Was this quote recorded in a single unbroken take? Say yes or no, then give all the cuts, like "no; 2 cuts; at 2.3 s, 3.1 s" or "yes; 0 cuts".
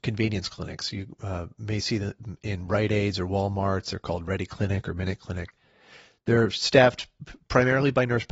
yes; 0 cuts